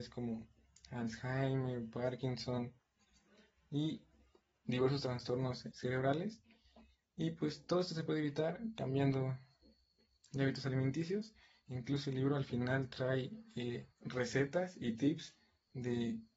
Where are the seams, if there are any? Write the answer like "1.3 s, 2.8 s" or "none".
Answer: 5.7 s, 13.9 s